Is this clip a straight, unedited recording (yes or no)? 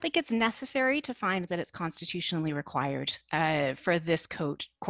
yes